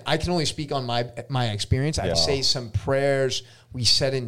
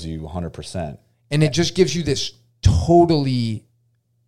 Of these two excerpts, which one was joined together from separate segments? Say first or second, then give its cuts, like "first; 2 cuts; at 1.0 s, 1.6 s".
first; 1 cut; at 2.1 s